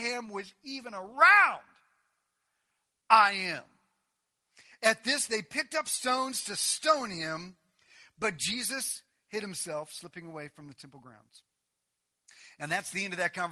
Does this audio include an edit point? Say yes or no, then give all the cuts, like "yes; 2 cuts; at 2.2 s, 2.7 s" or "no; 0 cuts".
no; 0 cuts